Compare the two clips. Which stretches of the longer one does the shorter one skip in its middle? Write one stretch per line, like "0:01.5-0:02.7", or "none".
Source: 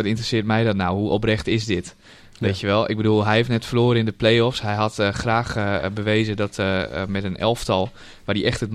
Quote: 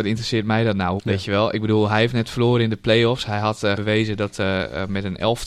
0:01.0-0:02.3
0:05.1-0:05.9